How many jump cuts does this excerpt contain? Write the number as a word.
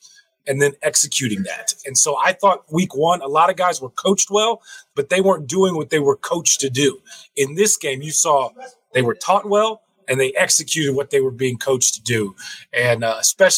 zero